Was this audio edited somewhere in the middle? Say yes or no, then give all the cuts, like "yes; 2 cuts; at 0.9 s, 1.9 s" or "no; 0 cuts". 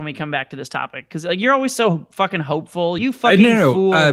yes; 1 cut; at 3.0 s